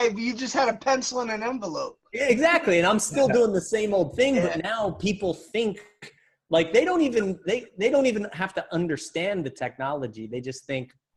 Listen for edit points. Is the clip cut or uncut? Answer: uncut